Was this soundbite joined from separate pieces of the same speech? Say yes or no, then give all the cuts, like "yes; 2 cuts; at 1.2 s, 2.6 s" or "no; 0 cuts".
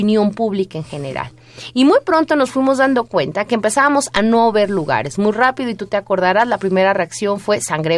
no; 0 cuts